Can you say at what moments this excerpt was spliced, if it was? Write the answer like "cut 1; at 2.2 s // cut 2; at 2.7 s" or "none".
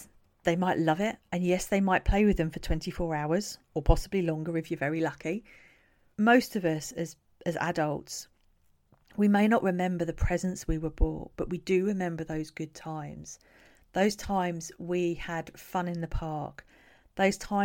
cut 1; at 6.1 s